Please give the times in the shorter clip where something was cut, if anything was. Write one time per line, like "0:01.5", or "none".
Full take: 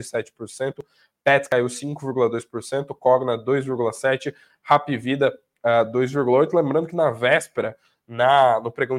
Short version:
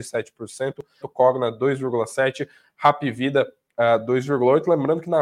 0:01.0